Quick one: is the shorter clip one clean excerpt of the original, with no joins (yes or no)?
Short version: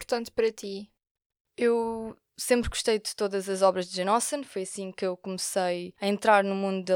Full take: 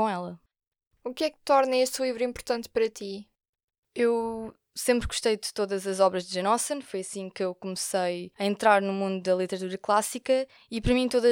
yes